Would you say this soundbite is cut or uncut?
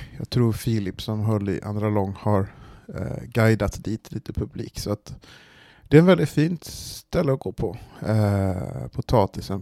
uncut